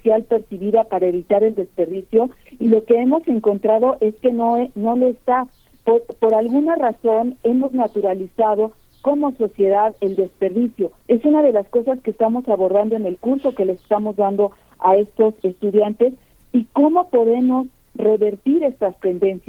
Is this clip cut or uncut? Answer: cut